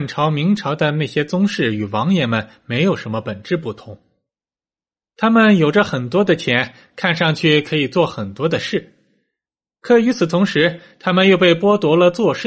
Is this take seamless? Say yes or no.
yes